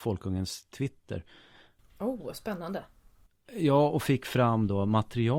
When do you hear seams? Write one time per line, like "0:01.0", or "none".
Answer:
0:01.8